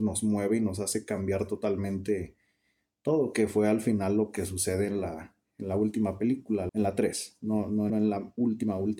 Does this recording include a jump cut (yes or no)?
yes